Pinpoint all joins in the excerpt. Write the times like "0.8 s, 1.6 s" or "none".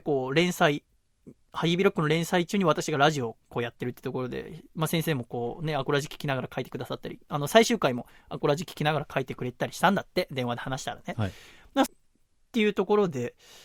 11.9 s

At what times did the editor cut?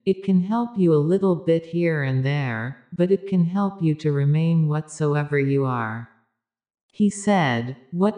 6.7 s

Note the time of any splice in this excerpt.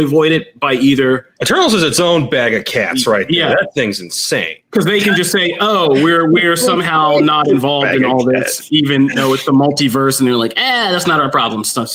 none

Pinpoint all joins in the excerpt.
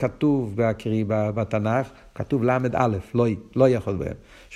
none

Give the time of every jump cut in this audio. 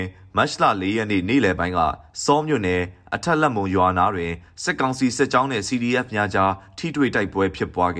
none

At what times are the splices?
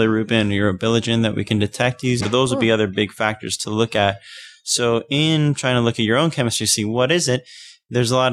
2.2 s

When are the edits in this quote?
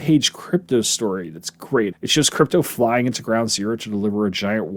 1.9 s

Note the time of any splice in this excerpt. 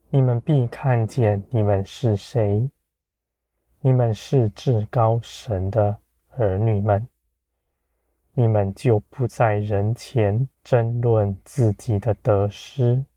8.2 s, 10.5 s

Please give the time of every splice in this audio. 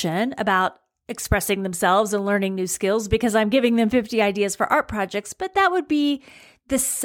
none

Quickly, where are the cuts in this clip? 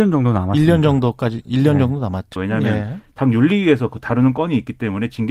2.4 s

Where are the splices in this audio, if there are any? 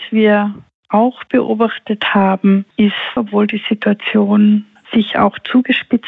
3.2 s

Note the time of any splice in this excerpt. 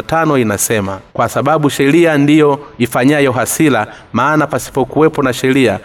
1.1 s

